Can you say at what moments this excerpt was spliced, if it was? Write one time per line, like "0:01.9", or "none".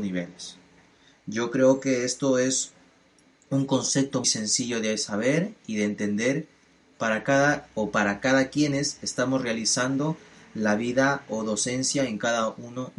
0:04.2